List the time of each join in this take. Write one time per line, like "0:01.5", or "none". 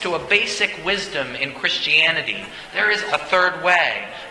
0:03.1